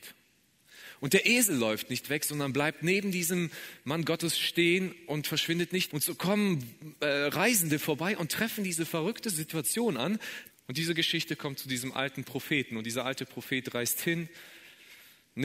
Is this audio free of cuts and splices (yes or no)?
no